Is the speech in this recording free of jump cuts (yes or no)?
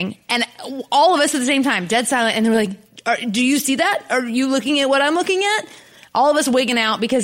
yes